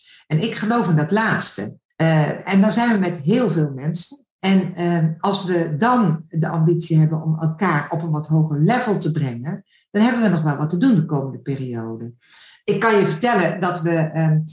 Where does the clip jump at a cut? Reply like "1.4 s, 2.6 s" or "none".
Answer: none